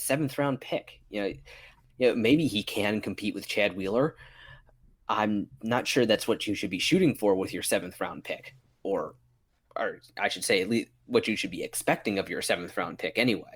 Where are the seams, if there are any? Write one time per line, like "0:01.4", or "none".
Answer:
0:01.9